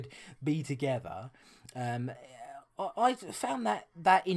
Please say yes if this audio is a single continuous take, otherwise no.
yes